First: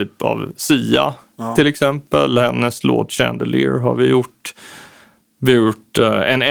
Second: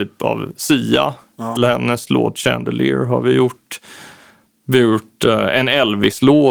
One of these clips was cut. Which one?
second; 1 cut; at 1.6 s

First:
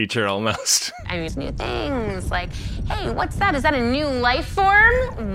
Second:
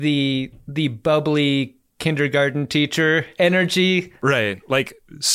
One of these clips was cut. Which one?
first; 1 cut; at 1.3 s

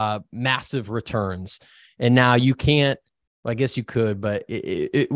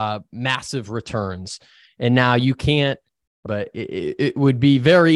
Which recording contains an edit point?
second; 1 cut; at 3.5 s

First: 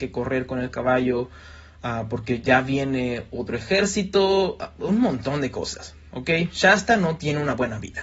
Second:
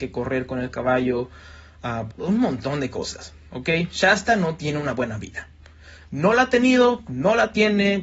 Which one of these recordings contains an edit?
second; 1 cut; at 2.1 s

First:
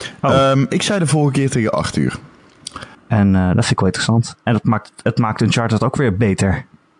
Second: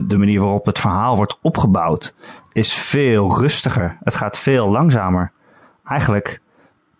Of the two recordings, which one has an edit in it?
first; 1 cut; at 2.9 s

